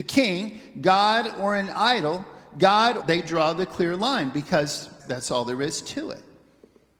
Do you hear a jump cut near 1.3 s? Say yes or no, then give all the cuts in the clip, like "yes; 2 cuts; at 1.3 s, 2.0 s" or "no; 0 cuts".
no; 2 cuts; at 3.0 s, 5.0 s